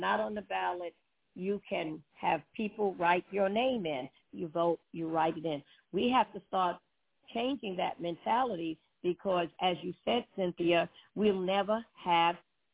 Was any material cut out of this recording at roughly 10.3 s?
no; 1 cut; at 4.2 s

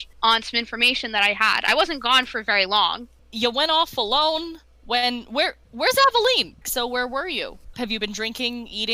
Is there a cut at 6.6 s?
yes; 2 cuts; at 6.6 s, 7.7 s

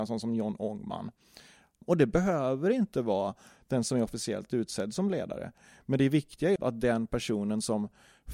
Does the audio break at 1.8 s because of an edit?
yes; 2 cuts; at 1.8 s, 6.6 s

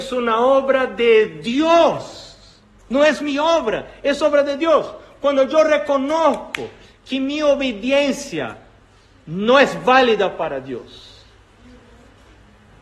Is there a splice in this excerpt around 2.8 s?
no; 0 cuts

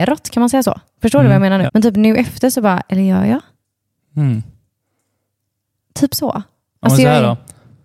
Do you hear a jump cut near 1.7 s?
yes; 1 cut; at 1.7 s

